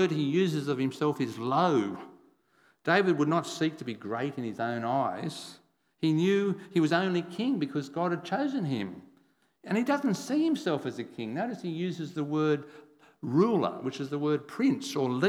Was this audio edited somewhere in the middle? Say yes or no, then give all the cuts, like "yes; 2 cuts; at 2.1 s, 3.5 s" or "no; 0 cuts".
no; 0 cuts